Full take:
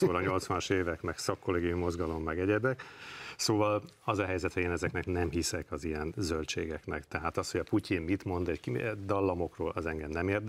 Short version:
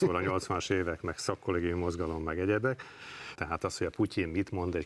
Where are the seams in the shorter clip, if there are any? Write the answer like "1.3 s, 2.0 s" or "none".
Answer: 3.4 s